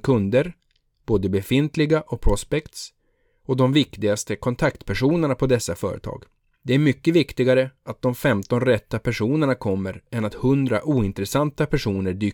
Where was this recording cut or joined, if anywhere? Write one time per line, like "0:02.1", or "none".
0:06.5